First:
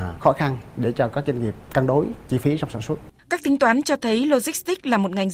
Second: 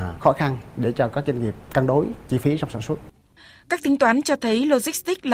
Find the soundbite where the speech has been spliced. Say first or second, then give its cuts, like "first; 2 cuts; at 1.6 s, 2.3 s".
first; 1 cut; at 3.2 s